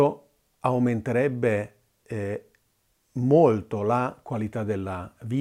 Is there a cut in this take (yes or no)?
no